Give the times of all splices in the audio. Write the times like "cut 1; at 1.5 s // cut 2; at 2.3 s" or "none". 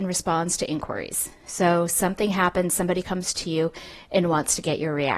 none